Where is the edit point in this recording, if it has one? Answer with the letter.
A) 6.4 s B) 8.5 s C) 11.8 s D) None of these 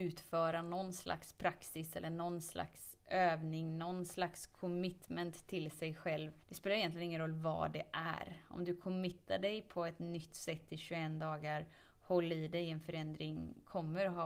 A